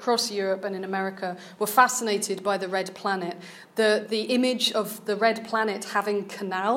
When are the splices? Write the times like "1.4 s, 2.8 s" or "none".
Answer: none